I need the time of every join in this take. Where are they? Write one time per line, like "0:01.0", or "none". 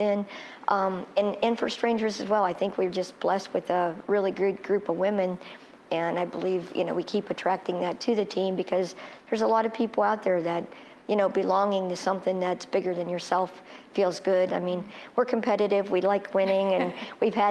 0:14.5